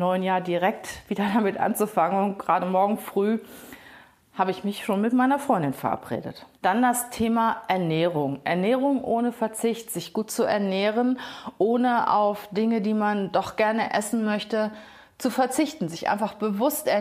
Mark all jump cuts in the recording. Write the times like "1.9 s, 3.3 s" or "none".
6.5 s